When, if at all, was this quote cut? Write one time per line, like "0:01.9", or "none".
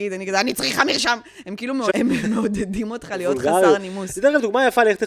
0:01.9

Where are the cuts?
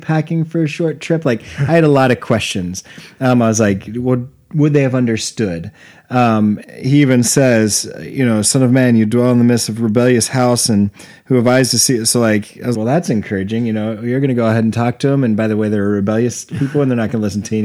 0:06.6
0:12.7

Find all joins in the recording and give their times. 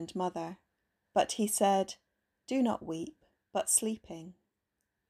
0:01.0
0:03.4

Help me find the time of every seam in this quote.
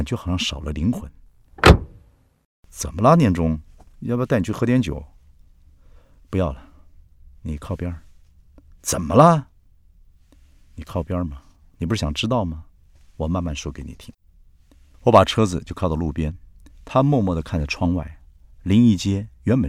none

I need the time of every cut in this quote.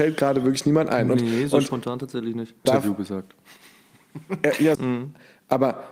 0:02.7
0:04.8

